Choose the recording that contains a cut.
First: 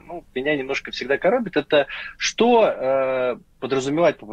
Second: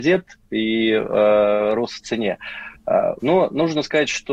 second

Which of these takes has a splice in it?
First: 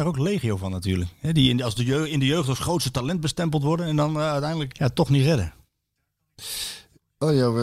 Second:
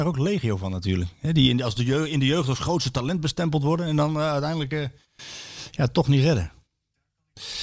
first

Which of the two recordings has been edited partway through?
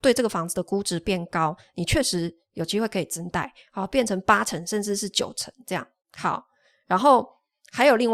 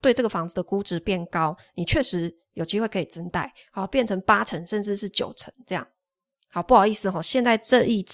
first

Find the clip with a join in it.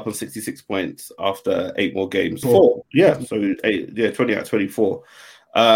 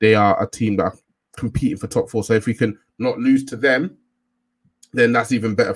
first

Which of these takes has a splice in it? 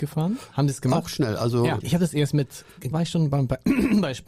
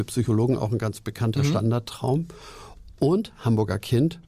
first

